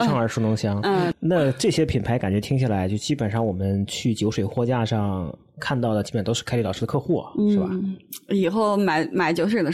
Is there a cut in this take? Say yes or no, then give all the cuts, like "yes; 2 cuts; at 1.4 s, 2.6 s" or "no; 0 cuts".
yes; 1 cut; at 6.0 s